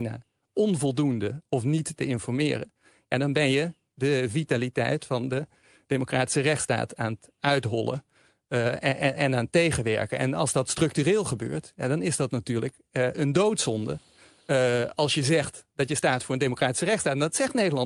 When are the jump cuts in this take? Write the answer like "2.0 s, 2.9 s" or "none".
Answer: 13.1 s